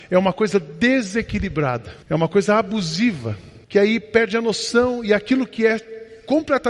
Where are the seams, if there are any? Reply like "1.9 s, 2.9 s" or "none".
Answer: 2.0 s, 3.6 s